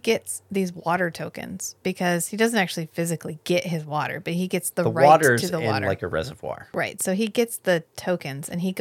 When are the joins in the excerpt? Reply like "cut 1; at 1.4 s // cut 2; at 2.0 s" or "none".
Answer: none